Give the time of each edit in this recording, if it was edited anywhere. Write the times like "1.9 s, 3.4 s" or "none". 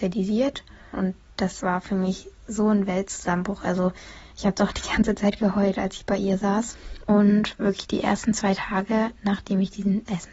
0.9 s, 7.0 s